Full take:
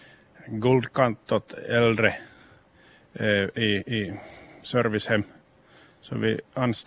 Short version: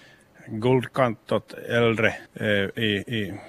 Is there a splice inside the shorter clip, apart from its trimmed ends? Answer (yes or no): yes